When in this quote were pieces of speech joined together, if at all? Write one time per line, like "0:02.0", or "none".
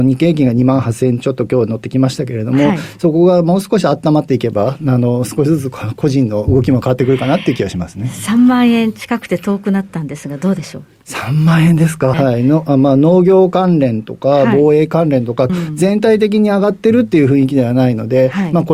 0:12.1
0:15.5